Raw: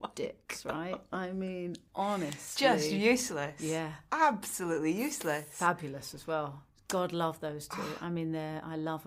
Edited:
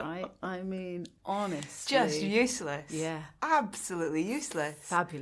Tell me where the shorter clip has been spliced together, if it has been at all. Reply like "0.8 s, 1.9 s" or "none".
none